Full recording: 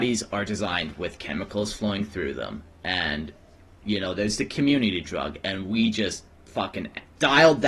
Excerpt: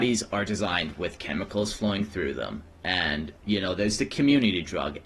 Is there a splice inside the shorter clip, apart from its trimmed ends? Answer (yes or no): yes